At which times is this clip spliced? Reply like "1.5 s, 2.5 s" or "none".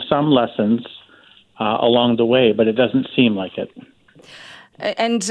none